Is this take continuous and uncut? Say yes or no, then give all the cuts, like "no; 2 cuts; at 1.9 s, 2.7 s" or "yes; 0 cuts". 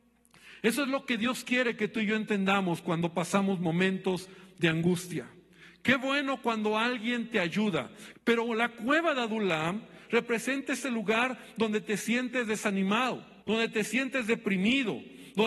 no; 2 cuts; at 8.1 s, 13.4 s